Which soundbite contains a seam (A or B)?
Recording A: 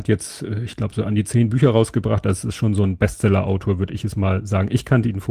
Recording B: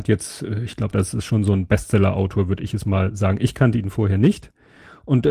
B